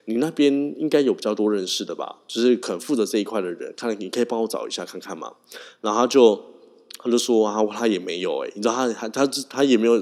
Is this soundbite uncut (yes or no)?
yes